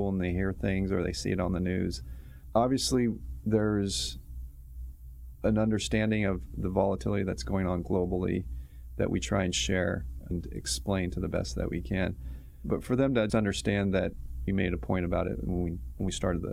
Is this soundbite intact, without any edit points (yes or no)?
no